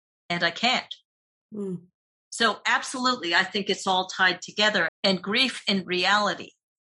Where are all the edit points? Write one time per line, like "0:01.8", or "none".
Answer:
0:02.2
0:04.9

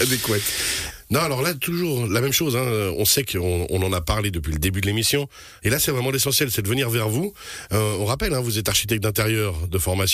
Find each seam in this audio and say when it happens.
0:05.6

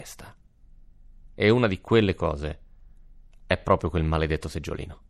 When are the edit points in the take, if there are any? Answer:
none

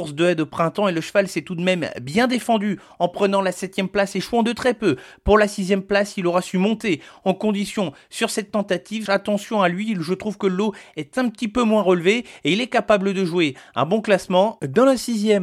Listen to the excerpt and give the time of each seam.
0:09.1

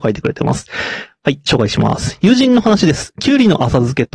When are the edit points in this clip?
none

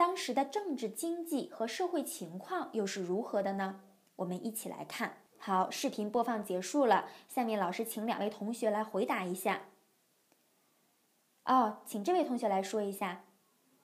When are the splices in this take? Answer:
0:05.3

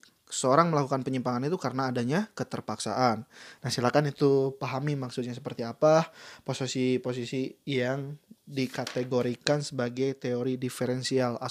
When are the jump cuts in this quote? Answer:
0:03.6

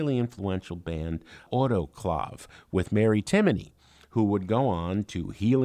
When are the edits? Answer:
none

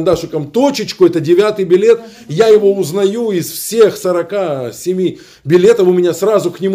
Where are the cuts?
none

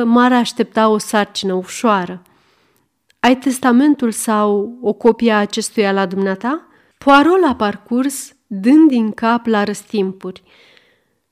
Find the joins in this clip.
0:06.9

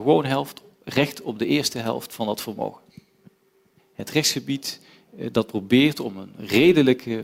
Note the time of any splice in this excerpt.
0:03.8

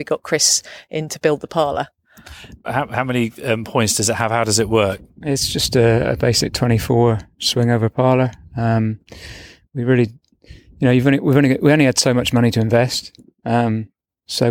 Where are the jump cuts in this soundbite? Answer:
0:02.6

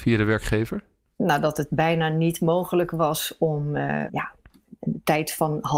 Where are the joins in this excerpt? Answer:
0:04.1

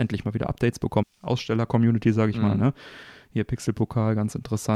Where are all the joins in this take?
0:01.0

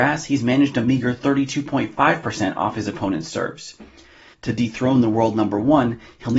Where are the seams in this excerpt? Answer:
0:04.3

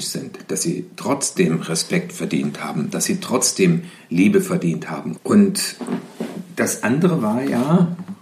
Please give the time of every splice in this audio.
0:05.1

